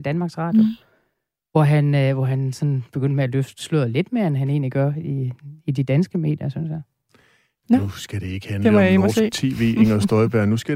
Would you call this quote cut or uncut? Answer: uncut